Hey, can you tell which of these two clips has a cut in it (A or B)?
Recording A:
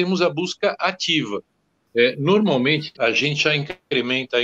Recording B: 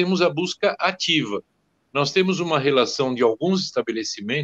A